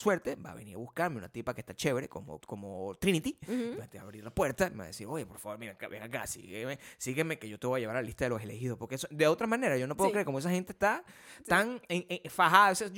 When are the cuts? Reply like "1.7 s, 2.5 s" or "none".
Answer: 2.4 s